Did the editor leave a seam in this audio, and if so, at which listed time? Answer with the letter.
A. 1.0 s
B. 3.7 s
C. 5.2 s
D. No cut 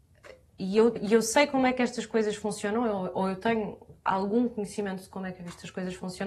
A